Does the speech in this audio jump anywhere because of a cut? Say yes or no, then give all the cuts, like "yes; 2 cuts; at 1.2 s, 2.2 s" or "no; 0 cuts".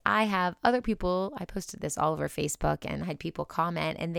no; 0 cuts